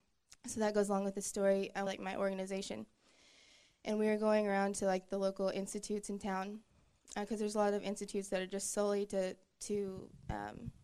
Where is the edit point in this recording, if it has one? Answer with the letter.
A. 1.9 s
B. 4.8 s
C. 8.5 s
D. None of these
A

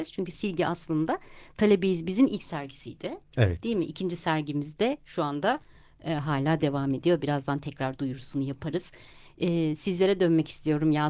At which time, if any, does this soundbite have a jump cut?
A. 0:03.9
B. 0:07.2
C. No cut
C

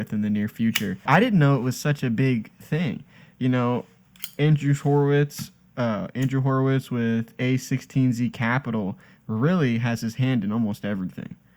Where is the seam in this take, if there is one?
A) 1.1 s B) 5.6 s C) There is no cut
A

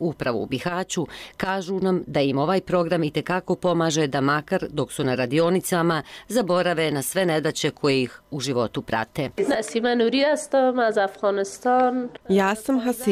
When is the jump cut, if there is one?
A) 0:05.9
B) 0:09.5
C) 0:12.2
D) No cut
C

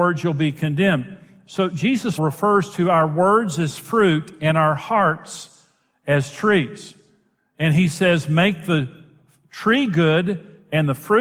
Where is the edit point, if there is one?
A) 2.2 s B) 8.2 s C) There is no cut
A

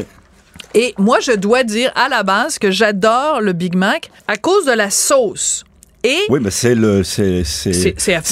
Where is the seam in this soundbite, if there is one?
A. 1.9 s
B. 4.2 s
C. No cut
B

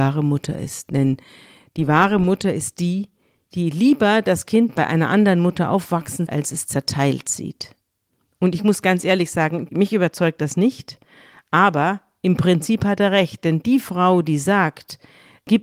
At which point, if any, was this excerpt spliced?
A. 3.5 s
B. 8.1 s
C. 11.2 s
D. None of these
D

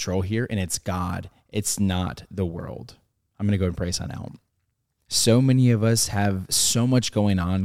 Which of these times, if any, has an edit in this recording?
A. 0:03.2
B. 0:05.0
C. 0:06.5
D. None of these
B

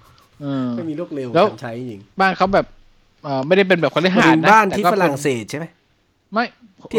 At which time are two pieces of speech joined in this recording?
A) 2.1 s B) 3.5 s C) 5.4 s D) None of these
A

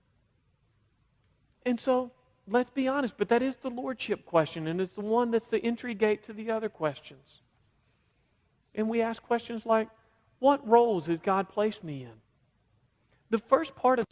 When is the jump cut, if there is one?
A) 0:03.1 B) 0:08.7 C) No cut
C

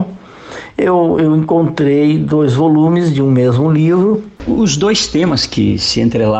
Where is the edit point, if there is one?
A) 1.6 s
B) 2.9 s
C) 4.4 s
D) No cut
C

